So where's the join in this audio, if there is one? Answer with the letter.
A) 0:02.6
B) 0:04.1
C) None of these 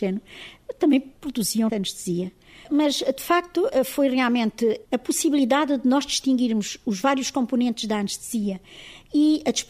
A